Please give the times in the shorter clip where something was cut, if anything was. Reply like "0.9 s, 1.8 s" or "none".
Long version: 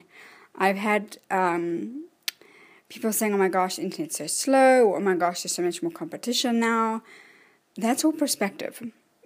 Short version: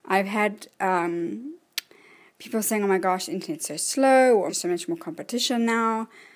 4.5 s